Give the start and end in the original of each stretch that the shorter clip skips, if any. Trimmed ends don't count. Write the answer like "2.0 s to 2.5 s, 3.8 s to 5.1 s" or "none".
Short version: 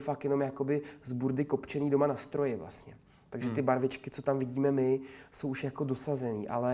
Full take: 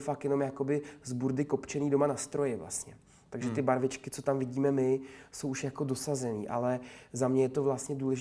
none